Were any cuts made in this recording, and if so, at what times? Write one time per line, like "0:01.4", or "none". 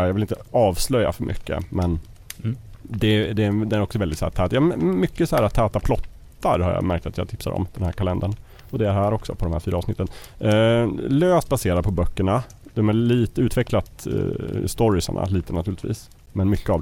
none